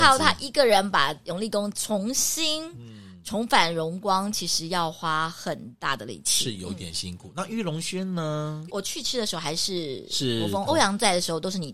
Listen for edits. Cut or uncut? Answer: cut